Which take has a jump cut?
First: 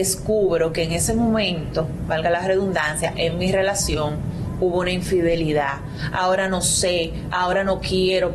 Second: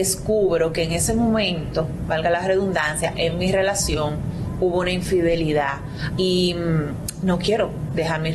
second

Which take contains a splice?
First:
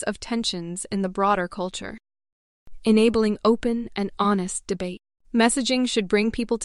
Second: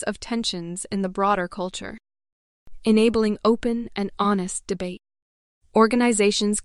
first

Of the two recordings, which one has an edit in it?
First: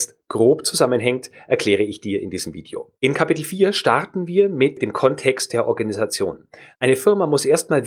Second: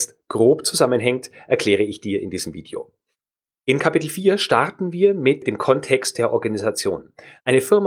first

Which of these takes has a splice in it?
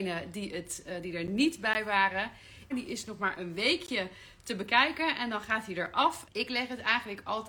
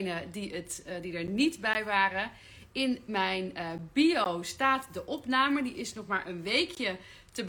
first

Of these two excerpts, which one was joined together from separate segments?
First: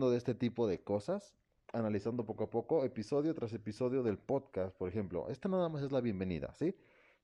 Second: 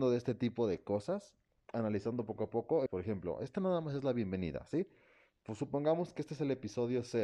second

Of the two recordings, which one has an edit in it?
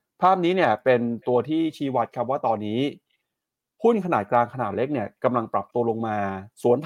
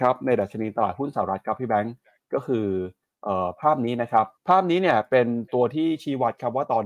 second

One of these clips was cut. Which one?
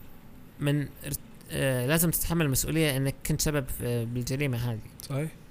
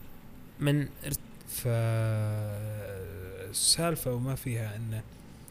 second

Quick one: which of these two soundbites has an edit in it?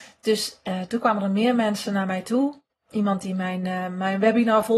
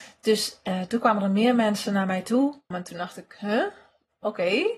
second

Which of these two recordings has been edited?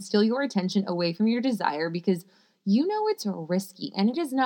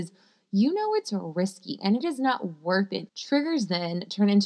second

